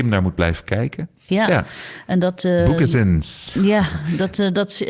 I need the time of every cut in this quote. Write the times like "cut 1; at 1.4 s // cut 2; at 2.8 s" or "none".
cut 1; at 1.3 s